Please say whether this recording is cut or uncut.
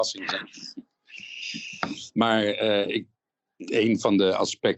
uncut